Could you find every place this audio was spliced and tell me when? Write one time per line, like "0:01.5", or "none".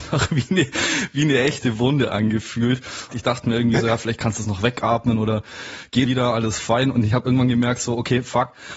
0:03.1
0:06.1